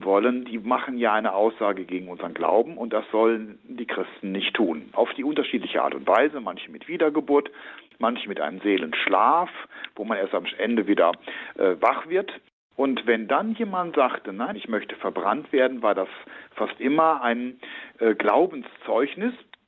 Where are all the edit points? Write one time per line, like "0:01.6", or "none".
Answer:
0:04.9
0:12.7
0:14.5